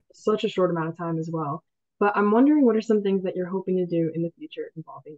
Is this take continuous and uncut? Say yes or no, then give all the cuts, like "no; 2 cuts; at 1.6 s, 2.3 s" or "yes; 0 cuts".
yes; 0 cuts